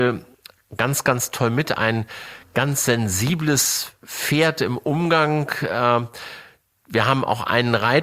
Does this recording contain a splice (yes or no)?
no